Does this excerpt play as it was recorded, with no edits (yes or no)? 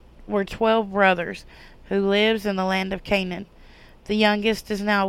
no